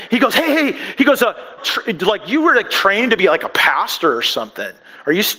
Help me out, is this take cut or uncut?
cut